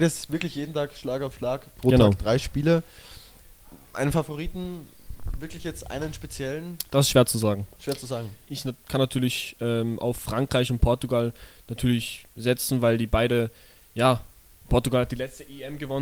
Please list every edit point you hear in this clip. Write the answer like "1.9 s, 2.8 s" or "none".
8.5 s